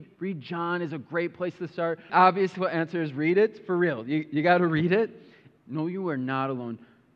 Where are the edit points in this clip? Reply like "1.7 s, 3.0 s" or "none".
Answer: 2.1 s, 5.6 s